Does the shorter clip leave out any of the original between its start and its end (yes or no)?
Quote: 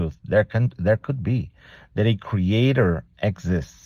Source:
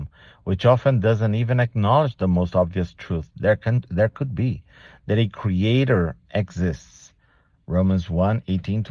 no